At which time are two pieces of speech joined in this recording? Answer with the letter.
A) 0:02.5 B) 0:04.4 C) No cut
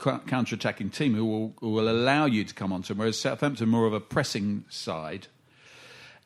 C